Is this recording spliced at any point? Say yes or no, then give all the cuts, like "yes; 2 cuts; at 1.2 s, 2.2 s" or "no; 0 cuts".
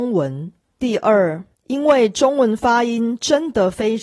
yes; 1 cut; at 1.5 s